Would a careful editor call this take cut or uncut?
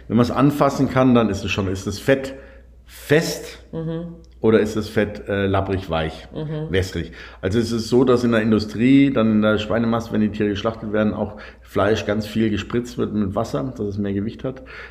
uncut